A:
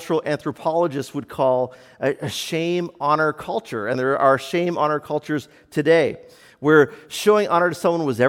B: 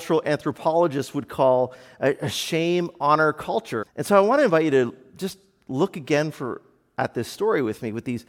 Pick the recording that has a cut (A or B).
B